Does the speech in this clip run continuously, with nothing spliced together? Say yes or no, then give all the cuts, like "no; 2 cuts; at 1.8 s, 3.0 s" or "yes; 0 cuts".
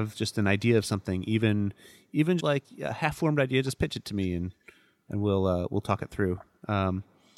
no; 1 cut; at 2.4 s